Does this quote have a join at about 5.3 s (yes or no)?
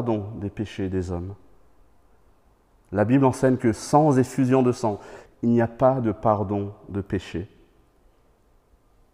yes